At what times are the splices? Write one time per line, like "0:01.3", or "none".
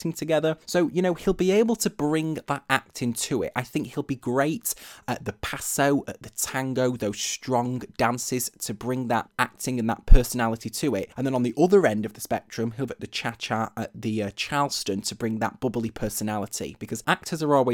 0:12.9